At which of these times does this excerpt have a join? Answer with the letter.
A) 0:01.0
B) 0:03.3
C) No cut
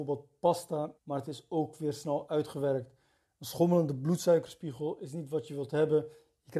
A